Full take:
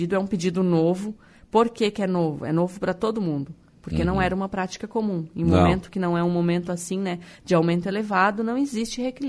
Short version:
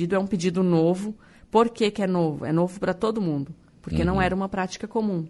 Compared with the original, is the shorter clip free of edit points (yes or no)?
yes